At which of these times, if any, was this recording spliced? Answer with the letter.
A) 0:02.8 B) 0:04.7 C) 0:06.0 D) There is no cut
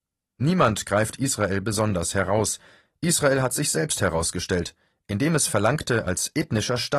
D